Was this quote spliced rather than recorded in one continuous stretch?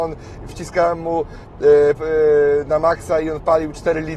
yes; 1 cut; at 2.0 s

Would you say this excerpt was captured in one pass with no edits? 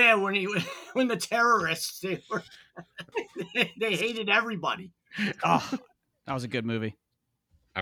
no; 1 cut; at 3.1 s

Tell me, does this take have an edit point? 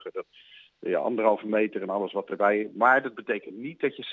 no; 0 cuts

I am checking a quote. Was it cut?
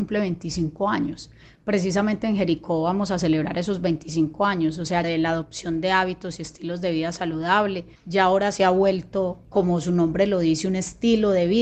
yes; 1 cut; at 5.0 s

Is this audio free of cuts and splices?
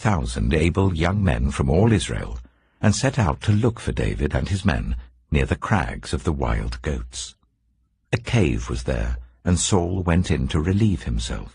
no; 1 cut; at 8.0 s

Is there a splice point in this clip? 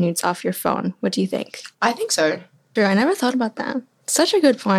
yes; 1 cut; at 2.8 s

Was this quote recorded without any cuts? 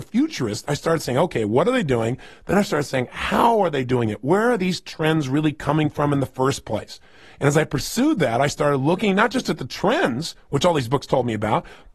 yes; 0 cuts

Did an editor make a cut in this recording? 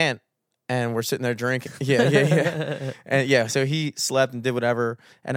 yes; 1 cut; at 1.7 s

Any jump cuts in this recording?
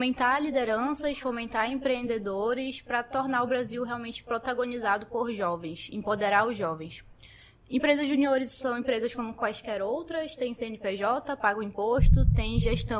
no; 0 cuts

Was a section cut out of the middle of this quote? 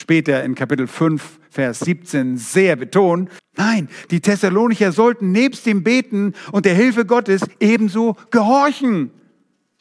yes; 1 cut; at 3.4 s

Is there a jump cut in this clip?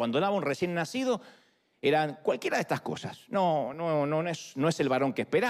no; 0 cuts

